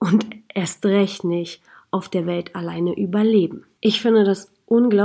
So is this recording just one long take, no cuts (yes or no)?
no